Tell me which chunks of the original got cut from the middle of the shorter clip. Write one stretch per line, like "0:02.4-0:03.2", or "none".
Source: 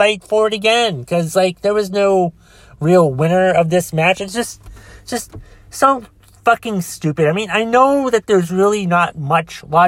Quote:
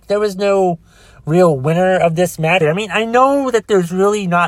0:04.1-0:07.2